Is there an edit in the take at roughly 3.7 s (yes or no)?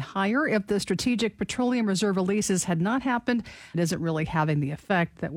yes